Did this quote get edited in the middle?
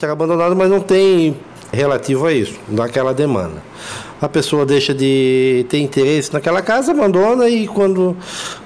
yes; 2 cuts; at 1.7 s, 4.2 s

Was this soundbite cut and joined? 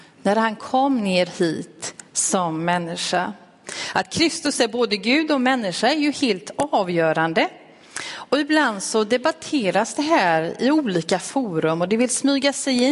no; 0 cuts

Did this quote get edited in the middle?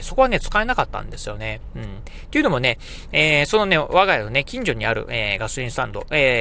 no; 0 cuts

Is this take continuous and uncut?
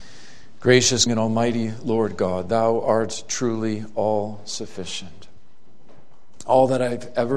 no; 1 cut; at 1.1 s

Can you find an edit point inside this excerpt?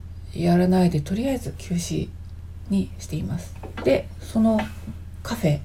no; 0 cuts

